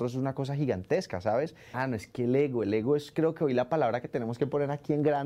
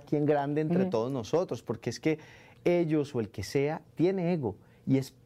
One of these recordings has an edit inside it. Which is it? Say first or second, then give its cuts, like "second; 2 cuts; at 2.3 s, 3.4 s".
first; 1 cut; at 1.7 s